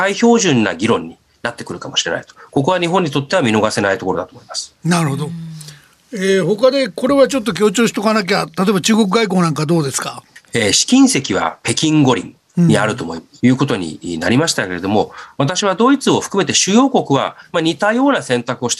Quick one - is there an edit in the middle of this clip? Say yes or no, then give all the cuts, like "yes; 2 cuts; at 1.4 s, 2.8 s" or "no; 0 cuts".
yes; 1 cut; at 13.4 s